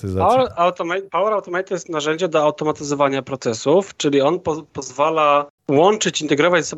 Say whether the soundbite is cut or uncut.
uncut